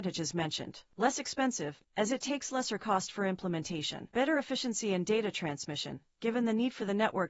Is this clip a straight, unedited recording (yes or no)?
no